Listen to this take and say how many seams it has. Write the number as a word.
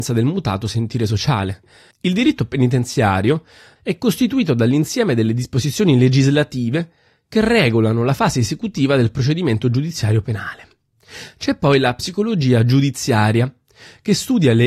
two